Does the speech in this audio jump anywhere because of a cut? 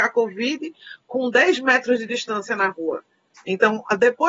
no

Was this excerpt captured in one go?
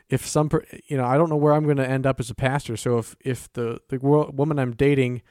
yes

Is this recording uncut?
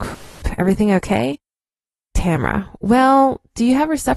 yes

